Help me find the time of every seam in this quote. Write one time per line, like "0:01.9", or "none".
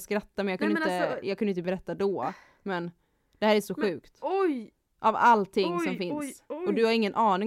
none

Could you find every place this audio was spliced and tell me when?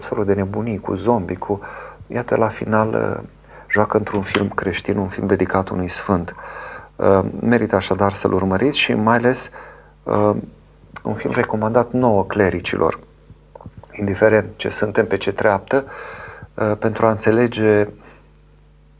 none

